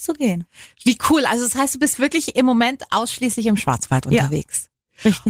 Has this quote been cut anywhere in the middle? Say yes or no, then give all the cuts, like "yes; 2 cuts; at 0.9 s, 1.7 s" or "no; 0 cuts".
no; 0 cuts